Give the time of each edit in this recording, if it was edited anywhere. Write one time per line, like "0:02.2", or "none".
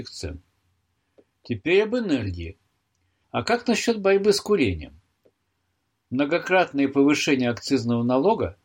0:03.2